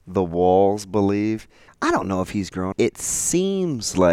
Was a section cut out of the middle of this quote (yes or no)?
yes